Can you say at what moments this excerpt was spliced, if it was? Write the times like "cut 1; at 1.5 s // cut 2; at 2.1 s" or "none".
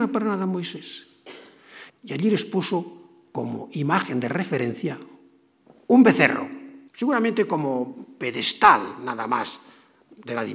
cut 1; at 1.9 s // cut 2; at 6.9 s